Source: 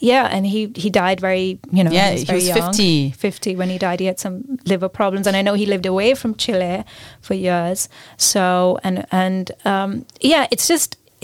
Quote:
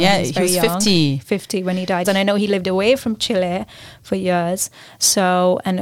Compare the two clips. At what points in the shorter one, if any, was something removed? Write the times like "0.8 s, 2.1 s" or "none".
2.0 s